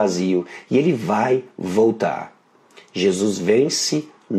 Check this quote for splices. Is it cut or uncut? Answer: uncut